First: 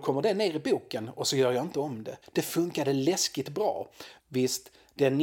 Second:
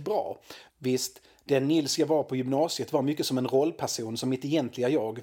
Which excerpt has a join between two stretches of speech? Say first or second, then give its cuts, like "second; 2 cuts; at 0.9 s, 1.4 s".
first; 1 cut; at 2.2 s